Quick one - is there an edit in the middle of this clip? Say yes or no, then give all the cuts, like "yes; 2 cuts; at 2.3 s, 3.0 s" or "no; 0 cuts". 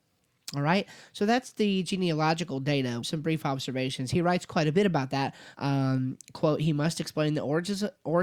yes; 2 cuts; at 3.0 s, 5.5 s